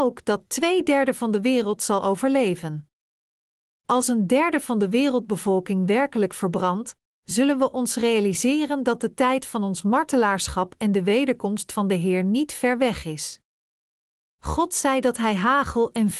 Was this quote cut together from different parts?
no; 0 cuts

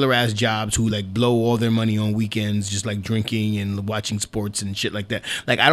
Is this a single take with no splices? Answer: yes; 0 cuts

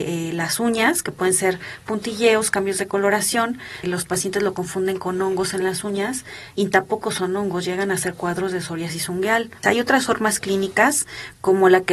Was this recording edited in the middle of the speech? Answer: yes; 2 cuts; at 3.8 s, 9.6 s

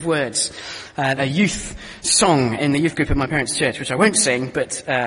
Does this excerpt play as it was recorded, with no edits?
no; 1 cut; at 1.2 s

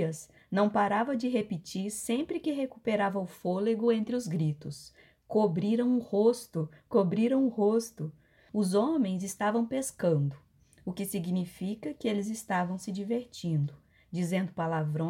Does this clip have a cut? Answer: yes; 1 cut; at 8.5 s

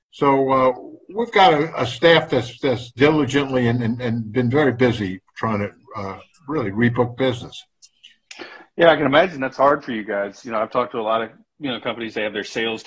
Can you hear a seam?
no; 0 cuts

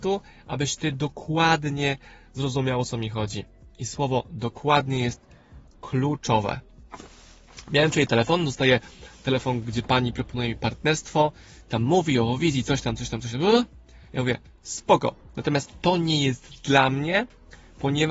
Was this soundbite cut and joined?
no; 0 cuts

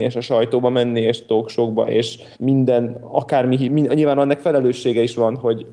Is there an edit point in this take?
yes; 1 cut; at 2.3 s

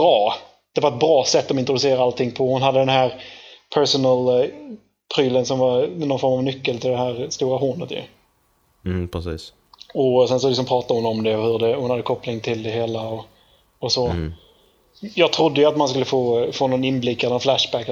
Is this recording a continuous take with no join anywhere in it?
yes; 0 cuts

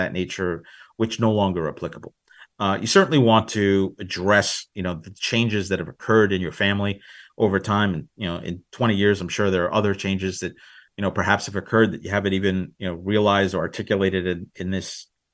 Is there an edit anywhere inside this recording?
no; 0 cuts

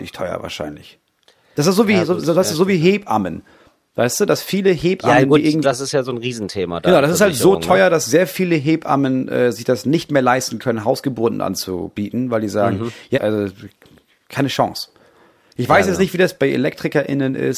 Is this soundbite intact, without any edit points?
no; 2 cuts; at 5.6 s, 13.1 s

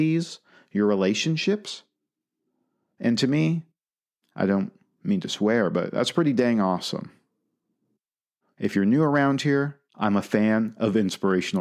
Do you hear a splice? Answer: yes; 2 cuts; at 8.4 s, 9.9 s

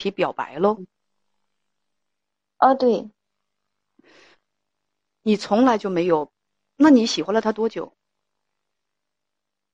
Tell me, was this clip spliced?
no; 0 cuts

